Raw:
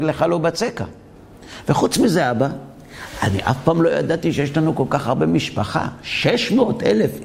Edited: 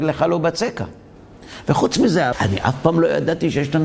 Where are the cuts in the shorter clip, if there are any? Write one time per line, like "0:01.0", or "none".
0:02.3